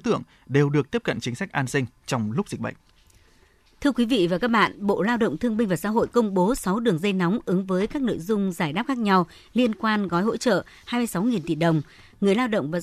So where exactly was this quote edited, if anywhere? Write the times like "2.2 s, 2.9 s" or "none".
none